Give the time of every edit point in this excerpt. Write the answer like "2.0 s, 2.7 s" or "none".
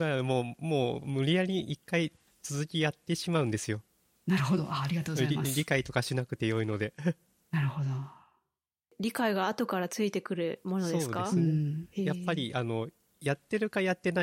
none